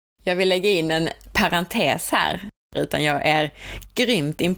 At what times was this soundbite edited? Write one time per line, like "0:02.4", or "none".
0:02.7